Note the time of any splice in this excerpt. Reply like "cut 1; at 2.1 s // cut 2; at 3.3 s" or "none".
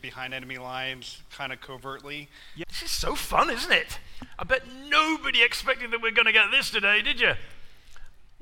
cut 1; at 2.6 s